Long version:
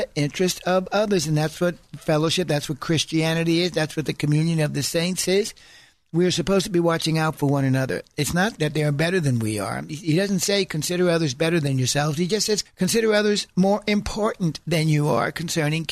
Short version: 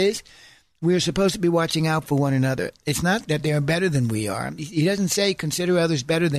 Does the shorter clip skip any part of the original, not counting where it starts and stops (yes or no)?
no